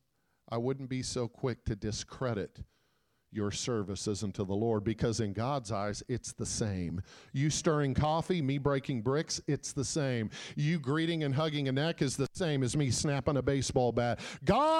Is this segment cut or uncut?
uncut